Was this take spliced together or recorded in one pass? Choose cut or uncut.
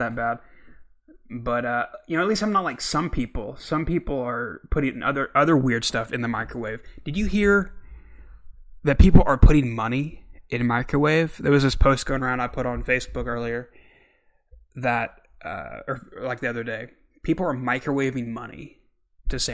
uncut